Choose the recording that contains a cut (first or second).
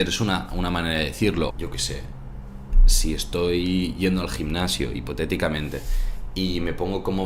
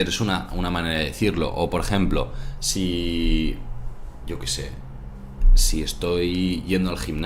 first